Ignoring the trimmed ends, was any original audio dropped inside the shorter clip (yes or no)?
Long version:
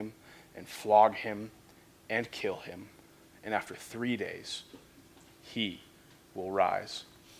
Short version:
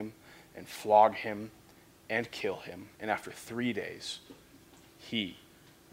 yes